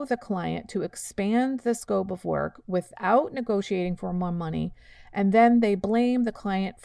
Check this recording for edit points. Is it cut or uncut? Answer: uncut